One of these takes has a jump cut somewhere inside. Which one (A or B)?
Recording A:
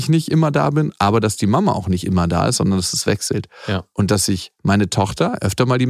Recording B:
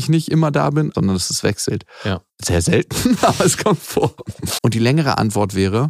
B